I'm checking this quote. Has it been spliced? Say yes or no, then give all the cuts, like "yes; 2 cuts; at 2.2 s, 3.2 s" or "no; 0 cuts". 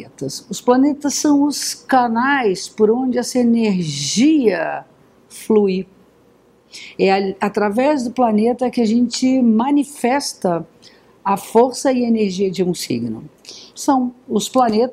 yes; 2 cuts; at 7.0 s, 13.7 s